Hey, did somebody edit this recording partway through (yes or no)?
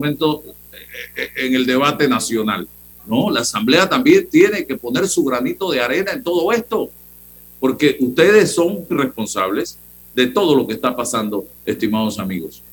yes